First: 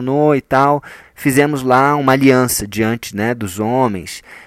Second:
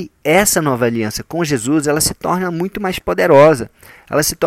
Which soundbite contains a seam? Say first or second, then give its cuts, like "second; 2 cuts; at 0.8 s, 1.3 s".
first; 1 cut; at 1.0 s